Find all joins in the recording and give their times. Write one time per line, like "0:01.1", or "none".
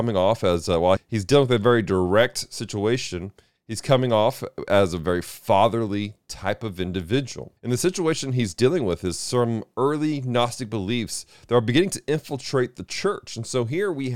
0:01.0
0:07.6